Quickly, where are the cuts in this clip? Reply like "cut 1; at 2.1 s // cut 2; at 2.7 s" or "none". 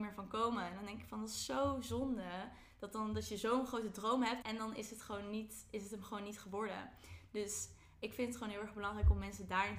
cut 1; at 4.4 s

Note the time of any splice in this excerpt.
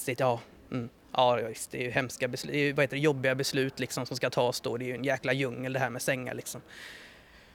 none

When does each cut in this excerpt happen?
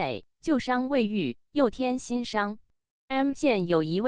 cut 1; at 2.9 s

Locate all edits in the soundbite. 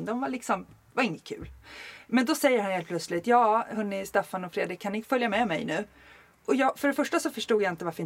none

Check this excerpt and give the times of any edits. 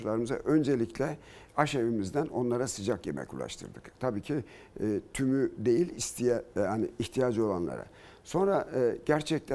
none

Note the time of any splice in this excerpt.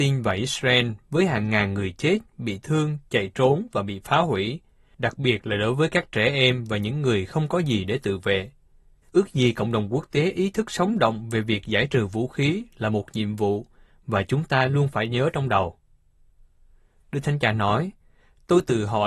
cut 1; at 9.0 s // cut 2; at 17.0 s

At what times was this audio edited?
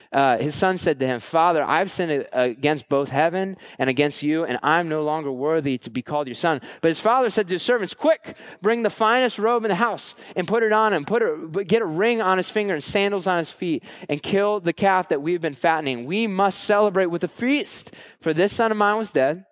none

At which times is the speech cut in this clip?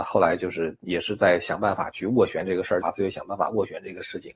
cut 1; at 2.8 s

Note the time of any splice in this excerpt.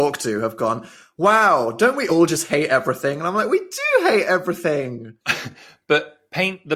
none

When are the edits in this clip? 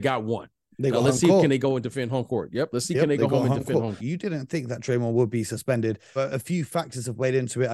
cut 1; at 4.0 s // cut 2; at 6.2 s

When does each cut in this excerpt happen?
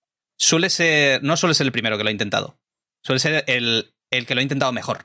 none

